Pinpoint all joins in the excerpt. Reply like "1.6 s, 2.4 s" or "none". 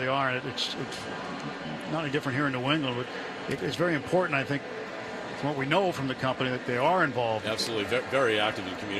none